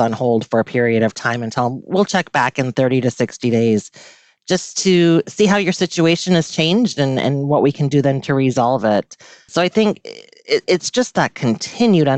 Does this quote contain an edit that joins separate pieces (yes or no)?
no